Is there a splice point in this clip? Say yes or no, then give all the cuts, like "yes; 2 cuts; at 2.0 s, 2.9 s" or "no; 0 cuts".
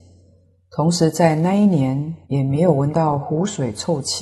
yes; 1 cut; at 2.2 s